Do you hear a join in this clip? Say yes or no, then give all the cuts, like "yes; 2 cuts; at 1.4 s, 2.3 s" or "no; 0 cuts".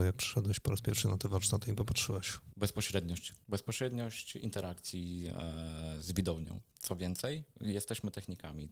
no; 0 cuts